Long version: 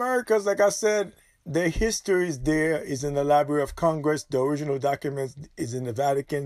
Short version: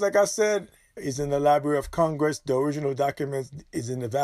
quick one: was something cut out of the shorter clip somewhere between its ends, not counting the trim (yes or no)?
yes